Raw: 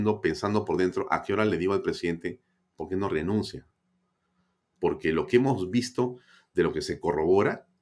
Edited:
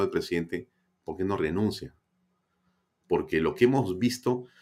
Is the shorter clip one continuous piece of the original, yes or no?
yes